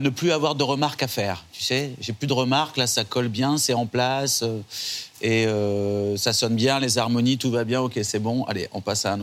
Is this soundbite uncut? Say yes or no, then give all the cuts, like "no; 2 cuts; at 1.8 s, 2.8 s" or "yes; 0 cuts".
yes; 0 cuts